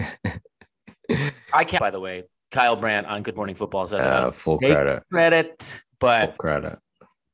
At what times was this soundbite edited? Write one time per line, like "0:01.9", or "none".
0:01.8